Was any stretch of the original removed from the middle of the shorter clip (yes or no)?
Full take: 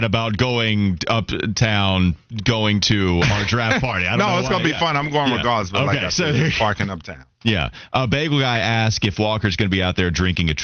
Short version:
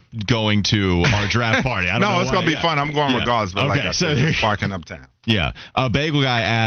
no